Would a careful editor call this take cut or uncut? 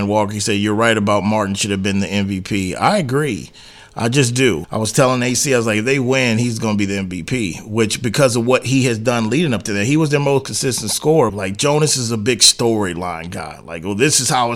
cut